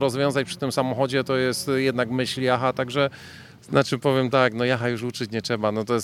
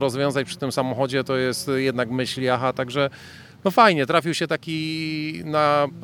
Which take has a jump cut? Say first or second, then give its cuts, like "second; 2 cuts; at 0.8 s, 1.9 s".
first; 1 cut; at 3.6 s